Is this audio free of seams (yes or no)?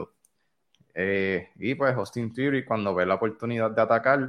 yes